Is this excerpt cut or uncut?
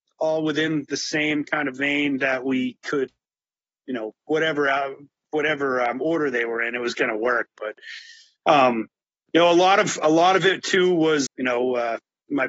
cut